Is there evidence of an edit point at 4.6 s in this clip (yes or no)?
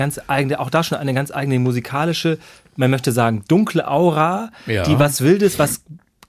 no